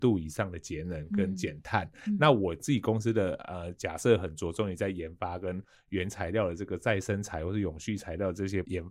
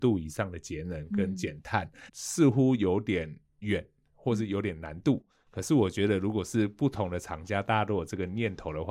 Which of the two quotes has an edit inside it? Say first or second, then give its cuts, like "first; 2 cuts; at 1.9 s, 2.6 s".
second; 1 cut; at 2.1 s